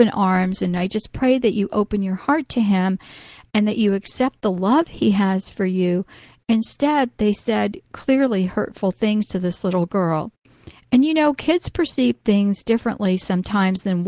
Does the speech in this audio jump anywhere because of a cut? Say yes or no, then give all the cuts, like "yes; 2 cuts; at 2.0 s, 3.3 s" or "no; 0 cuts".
no; 0 cuts